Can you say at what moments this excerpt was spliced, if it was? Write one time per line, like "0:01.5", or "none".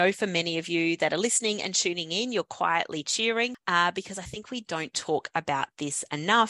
none